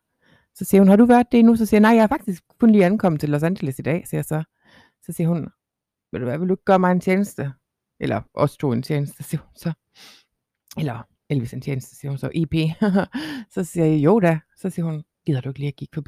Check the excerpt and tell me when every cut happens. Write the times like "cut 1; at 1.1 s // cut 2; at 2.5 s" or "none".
none